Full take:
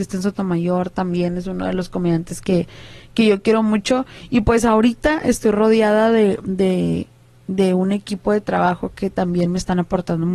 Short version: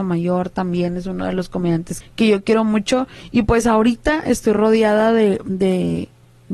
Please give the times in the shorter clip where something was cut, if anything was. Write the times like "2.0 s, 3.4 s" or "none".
2.0 s